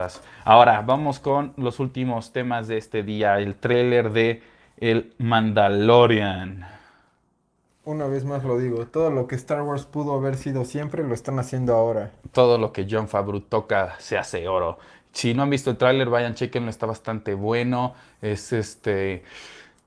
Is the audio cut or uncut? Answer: uncut